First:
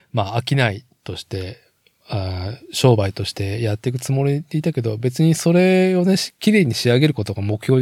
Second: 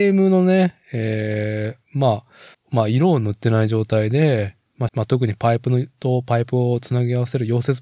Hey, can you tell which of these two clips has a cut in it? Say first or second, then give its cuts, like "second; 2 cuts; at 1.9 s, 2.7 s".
second; 2 cuts; at 2.5 s, 4.9 s